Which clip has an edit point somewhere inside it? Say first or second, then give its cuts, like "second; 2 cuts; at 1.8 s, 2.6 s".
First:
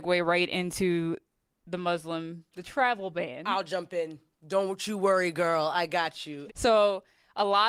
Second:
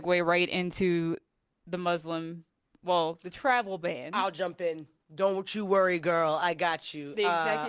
first; 2 cuts; at 2.5 s, 6.5 s